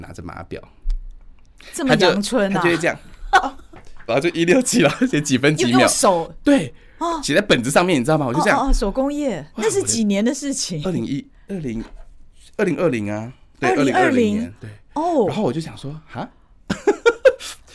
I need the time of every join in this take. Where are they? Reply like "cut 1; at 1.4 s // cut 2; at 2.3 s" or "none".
cut 1; at 4.1 s